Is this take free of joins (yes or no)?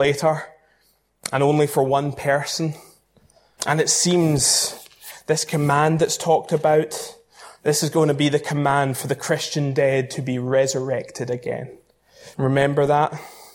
no